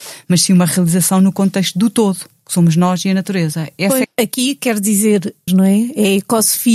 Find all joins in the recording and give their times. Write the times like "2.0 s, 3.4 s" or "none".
4.0 s, 5.5 s